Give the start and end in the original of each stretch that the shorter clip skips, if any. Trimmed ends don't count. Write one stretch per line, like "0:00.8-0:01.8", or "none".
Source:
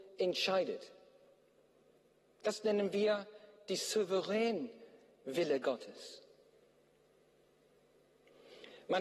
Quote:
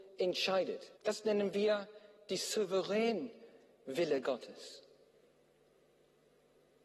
0:01.0-0:02.3